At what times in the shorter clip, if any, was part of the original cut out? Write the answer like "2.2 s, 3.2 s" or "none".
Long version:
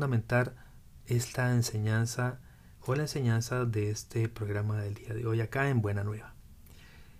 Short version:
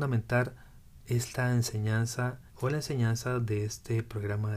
2.5 s